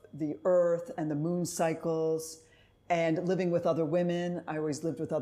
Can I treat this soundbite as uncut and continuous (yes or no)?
yes